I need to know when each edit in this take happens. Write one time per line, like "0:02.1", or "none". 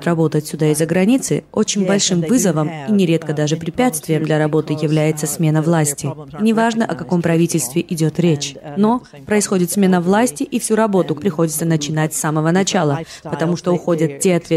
0:08.7
0:11.2

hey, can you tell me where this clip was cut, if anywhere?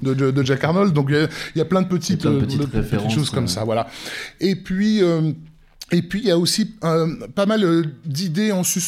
none

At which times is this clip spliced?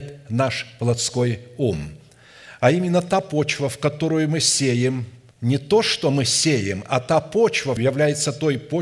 0:05.3
0:07.8

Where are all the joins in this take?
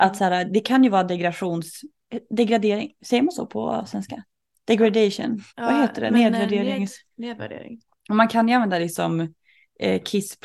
0:05.5

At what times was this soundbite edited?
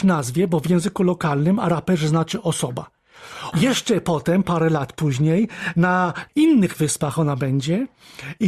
0:03.5

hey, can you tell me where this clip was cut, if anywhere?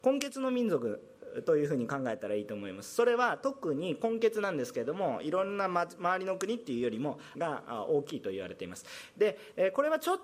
0:07.3

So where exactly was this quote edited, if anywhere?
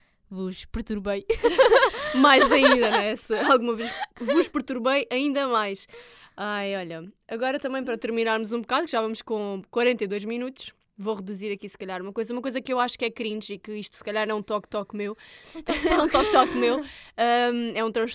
none

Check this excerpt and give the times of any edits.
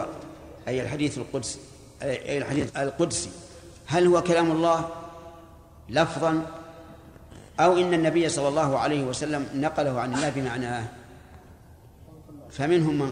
0:02.7

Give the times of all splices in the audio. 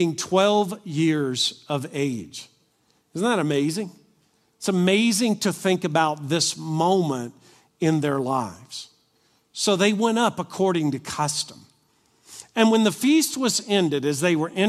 none

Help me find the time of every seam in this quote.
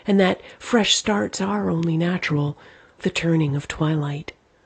0:03.0

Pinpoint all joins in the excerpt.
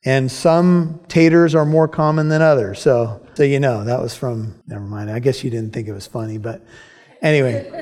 0:03.4
0:04.6

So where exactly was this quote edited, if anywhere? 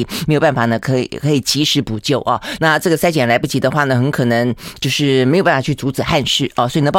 0:02.6

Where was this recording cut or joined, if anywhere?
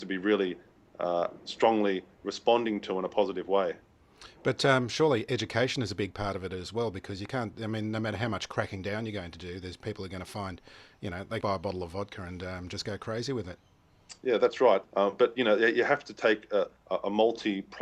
0:11.4
0:14.8

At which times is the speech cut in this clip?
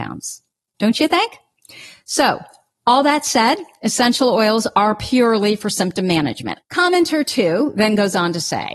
0:06.6

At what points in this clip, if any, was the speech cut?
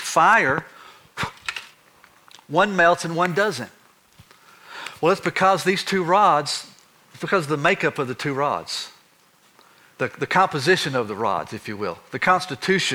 none

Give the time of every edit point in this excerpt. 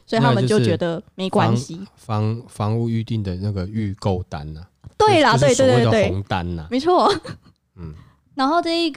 none

